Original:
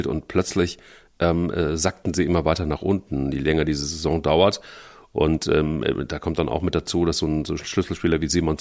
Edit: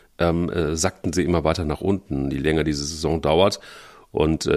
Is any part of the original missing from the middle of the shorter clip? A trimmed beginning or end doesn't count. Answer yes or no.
no